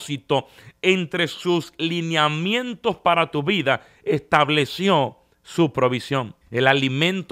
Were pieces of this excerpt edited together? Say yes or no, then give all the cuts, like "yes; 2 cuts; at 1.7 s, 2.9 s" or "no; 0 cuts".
yes; 1 cut; at 6.4 s